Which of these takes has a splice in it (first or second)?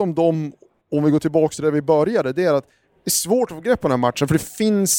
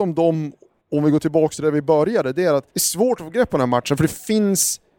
second